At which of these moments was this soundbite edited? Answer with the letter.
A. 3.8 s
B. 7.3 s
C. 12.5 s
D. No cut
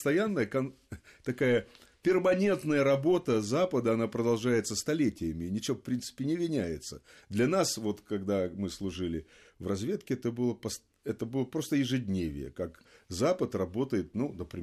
D